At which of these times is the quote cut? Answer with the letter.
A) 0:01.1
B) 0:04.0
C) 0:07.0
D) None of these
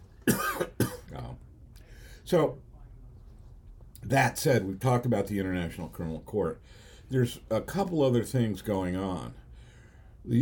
A